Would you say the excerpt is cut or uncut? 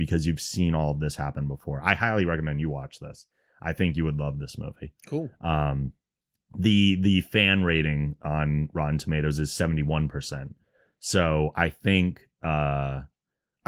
uncut